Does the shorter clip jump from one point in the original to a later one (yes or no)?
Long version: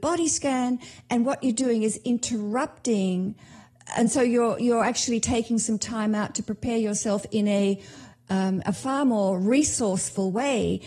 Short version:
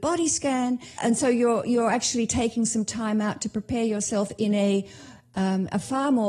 yes